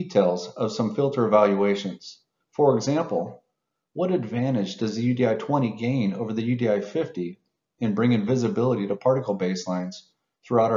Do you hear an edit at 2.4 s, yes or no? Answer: yes